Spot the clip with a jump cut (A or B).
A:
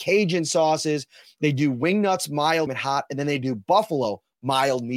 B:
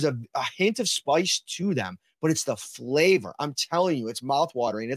A